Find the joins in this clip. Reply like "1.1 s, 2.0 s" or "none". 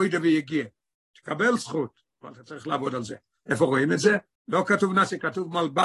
2.1 s, 4.4 s